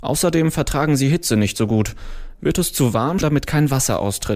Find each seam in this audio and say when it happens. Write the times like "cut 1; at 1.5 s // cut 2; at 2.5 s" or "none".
cut 1; at 3.2 s